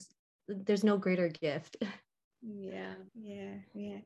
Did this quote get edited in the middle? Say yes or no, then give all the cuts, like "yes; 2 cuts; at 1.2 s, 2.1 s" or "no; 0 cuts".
yes; 1 cut; at 3.1 s